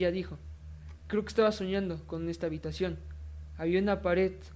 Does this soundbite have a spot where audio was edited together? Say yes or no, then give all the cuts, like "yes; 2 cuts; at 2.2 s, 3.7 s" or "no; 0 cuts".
no; 0 cuts